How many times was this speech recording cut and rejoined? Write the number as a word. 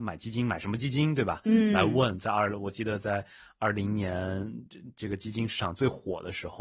zero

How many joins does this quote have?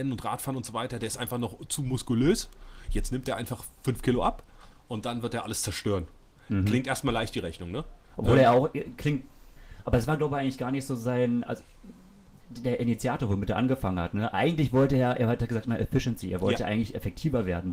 one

